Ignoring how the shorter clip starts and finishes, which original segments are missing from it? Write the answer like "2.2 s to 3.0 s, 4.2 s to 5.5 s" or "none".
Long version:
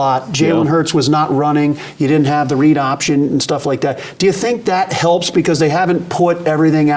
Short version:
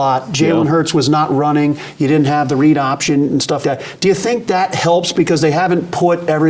3.6 s to 3.8 s